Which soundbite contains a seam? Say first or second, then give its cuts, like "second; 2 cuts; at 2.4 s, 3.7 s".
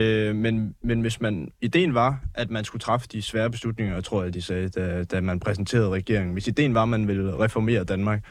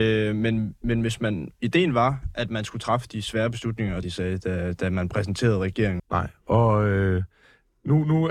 second; 2 cuts; at 4.0 s, 6.0 s